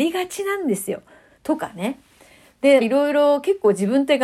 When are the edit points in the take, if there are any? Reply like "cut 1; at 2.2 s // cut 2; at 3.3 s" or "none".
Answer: cut 1; at 1.4 s // cut 2; at 2.8 s